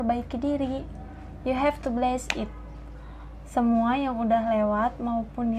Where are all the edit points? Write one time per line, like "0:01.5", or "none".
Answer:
none